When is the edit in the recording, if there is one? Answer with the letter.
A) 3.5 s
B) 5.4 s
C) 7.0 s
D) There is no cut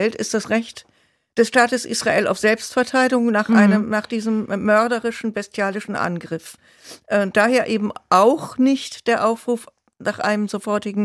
D